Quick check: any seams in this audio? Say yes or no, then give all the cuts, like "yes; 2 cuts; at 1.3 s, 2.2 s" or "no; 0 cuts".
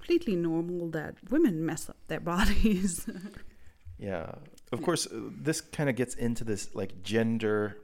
no; 0 cuts